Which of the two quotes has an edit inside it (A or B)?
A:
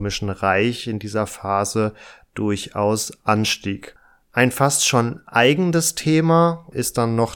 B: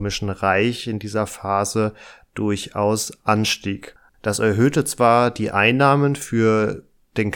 B